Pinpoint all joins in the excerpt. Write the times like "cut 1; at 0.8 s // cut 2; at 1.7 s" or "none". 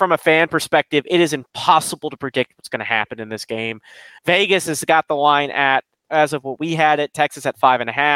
none